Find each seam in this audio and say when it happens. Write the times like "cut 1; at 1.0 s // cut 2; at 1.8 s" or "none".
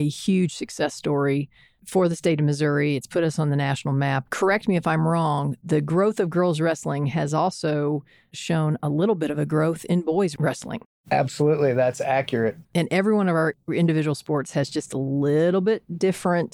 cut 1; at 4.3 s // cut 2; at 12.6 s